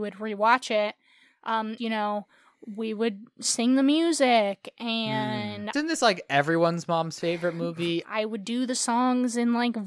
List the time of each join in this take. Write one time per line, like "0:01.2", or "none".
0:01.8
0:05.7
0:08.0